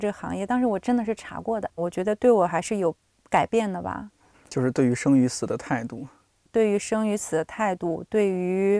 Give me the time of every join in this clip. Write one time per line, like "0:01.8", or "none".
0:01.8